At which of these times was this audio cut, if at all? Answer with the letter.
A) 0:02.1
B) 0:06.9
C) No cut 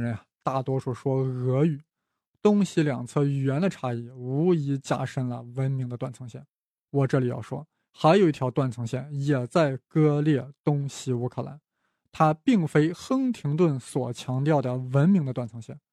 B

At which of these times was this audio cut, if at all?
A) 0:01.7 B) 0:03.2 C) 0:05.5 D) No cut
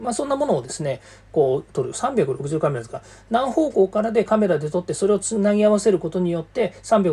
A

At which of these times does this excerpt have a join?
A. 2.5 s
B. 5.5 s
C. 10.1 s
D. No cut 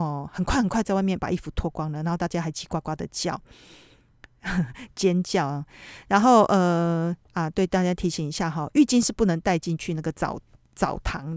A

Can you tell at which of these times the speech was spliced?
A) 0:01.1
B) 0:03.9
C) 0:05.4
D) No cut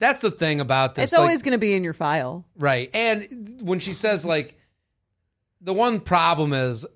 D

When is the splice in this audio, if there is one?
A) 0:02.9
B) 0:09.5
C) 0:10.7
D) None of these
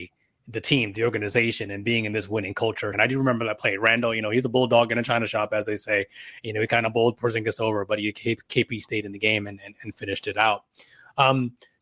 A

